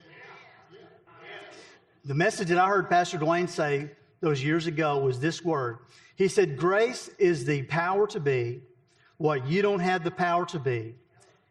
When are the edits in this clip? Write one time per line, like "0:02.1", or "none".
0:01.1